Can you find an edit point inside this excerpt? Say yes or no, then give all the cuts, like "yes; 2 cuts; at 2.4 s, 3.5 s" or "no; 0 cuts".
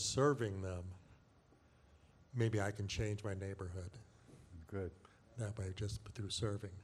no; 0 cuts